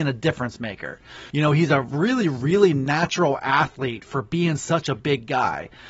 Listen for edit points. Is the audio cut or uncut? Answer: cut